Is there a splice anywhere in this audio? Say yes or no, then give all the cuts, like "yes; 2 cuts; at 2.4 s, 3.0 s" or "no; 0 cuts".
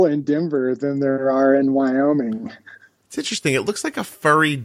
no; 0 cuts